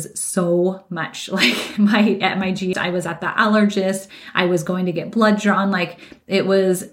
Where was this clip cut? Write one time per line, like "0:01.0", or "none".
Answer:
0:02.7